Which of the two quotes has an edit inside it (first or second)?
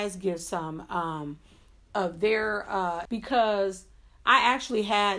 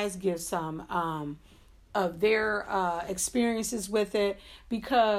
first